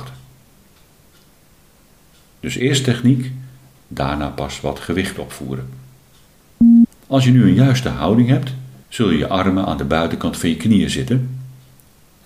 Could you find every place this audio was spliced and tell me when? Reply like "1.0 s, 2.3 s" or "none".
7.0 s, 8.8 s